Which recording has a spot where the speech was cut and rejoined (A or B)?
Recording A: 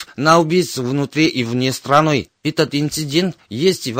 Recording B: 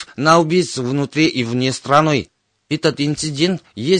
A